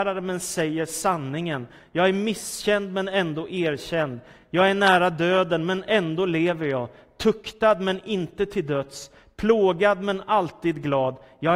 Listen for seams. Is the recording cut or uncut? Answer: uncut